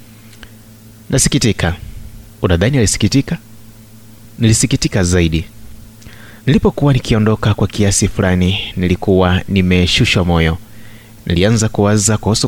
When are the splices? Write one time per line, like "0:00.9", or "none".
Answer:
0:02.3
0:06.4